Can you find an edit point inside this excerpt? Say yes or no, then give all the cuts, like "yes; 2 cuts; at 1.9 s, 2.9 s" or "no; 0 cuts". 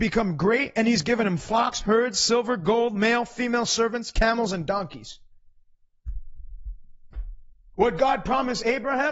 no; 0 cuts